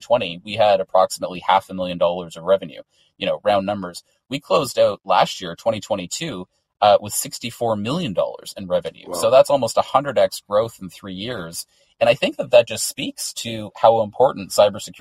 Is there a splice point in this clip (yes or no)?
no